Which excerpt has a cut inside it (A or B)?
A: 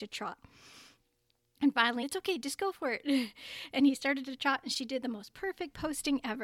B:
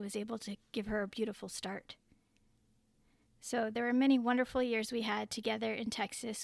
A